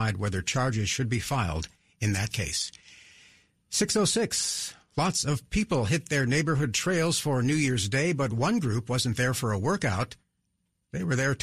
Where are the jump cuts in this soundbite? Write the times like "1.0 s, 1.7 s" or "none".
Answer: none